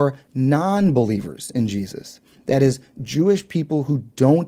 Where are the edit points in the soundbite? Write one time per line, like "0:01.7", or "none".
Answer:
none